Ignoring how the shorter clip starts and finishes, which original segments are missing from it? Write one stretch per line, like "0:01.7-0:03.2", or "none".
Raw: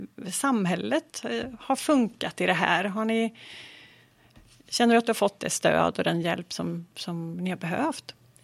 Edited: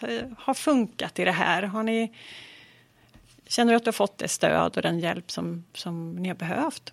none